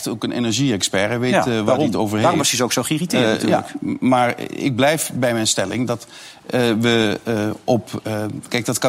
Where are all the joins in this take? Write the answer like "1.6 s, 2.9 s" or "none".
none

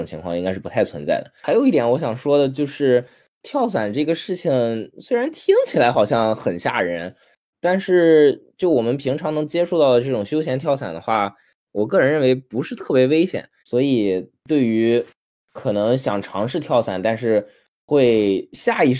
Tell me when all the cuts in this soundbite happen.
13.6 s

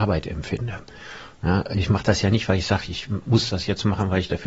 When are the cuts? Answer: none

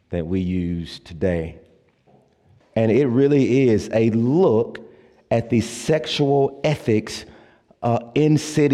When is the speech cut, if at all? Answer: 2.6 s

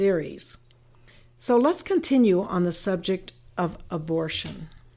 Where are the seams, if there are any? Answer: none

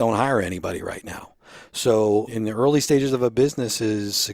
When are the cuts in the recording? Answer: 2.3 s

